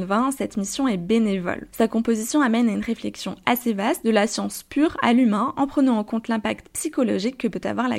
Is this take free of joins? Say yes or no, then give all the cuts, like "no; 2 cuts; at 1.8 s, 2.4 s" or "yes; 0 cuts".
yes; 0 cuts